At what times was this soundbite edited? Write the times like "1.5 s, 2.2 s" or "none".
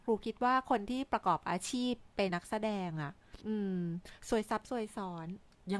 2.3 s, 3.4 s